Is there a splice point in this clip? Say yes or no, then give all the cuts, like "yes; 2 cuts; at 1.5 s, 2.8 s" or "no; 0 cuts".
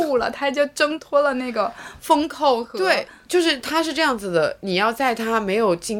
no; 0 cuts